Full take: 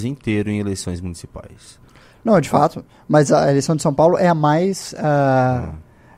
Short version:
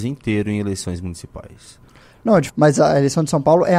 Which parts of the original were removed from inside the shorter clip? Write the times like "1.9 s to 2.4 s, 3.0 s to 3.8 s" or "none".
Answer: 2.5 s to 3.0 s